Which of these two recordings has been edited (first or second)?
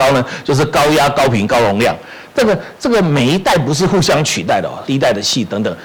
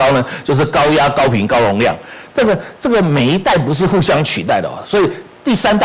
first